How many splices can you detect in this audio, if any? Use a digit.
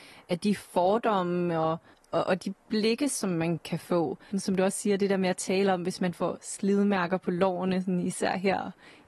1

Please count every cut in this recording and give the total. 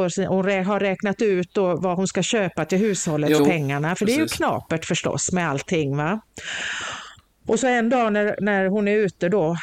1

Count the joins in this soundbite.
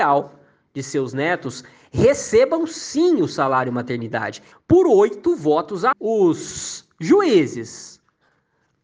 2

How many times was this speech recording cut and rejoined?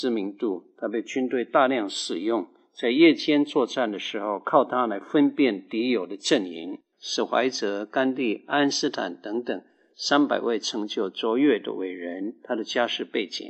1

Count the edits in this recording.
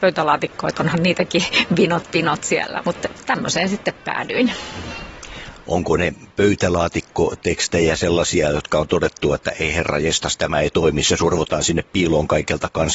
1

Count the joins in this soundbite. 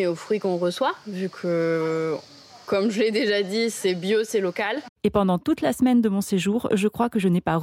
1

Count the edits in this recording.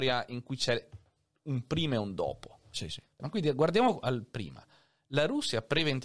1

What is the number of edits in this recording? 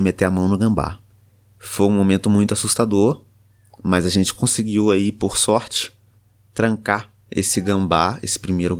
0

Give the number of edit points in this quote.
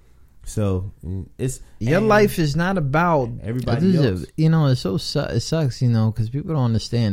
2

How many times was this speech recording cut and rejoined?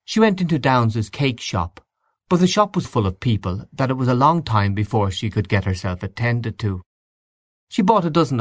1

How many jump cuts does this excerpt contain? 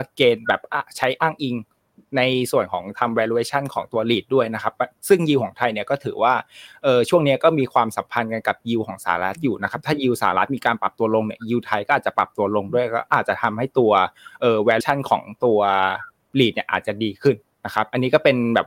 0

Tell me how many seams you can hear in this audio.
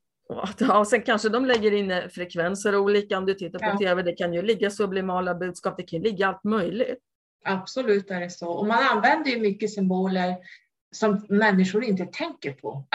0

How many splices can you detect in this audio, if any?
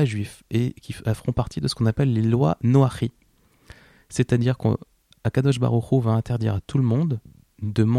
0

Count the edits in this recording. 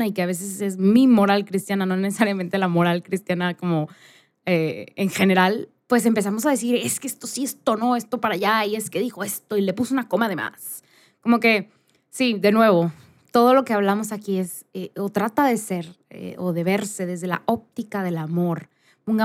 0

